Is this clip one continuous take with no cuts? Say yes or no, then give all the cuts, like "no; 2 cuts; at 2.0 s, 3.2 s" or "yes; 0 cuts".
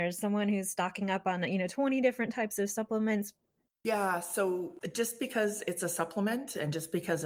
no; 1 cut; at 3.7 s